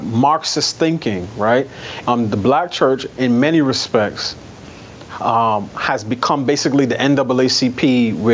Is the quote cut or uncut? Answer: cut